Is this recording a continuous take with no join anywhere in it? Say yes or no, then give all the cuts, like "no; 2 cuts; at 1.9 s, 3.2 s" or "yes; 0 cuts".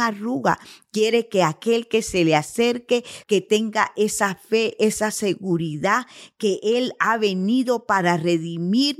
no; 1 cut; at 3.2 s